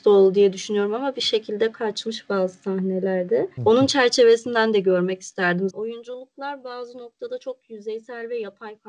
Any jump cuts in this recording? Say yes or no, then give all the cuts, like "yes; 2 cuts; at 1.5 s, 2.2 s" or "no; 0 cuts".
yes; 2 cuts; at 3.6 s, 5.7 s